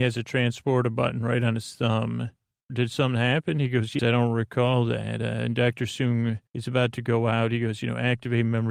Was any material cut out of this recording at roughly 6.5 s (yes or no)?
yes